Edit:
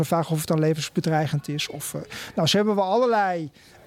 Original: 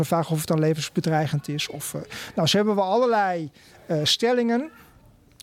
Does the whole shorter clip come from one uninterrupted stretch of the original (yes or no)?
yes